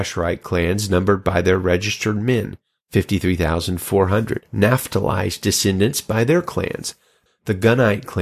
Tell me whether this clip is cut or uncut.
cut